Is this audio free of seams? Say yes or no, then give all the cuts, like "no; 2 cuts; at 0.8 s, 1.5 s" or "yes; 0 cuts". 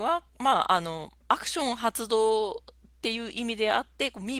yes; 0 cuts